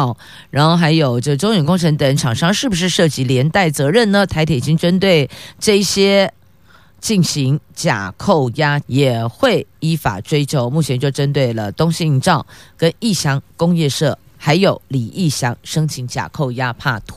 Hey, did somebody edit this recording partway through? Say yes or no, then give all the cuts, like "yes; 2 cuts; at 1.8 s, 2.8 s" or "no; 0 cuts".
yes; 1 cut; at 8.8 s